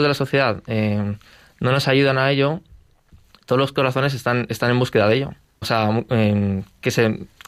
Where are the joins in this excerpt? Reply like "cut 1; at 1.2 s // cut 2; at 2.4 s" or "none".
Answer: cut 1; at 5.6 s